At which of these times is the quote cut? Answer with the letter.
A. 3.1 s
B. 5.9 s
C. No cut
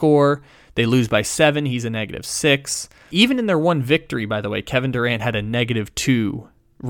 A